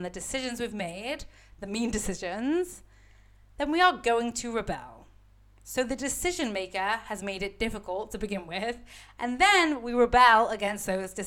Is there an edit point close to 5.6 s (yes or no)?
no